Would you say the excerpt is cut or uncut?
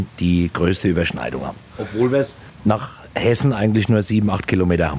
uncut